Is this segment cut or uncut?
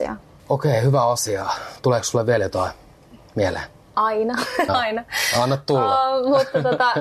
cut